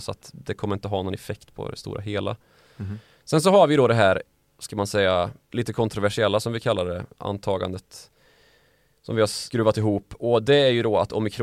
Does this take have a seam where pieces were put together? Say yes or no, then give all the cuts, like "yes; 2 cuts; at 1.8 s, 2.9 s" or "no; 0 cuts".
no; 0 cuts